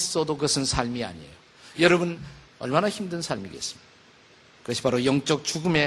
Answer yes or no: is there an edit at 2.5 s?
yes